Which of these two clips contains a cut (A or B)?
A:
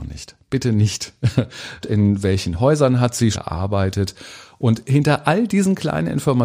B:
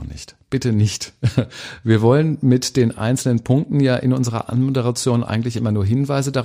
A